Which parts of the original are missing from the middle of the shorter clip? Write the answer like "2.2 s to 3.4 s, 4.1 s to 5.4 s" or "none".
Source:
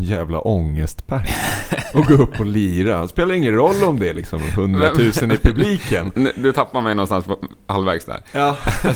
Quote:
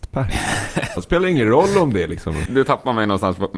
1.9 s to 3.0 s, 4.5 s to 6.3 s